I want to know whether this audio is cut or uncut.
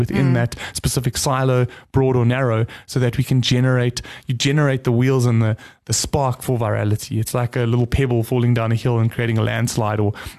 uncut